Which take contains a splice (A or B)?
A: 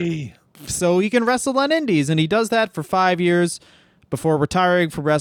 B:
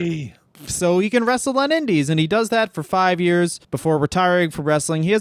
B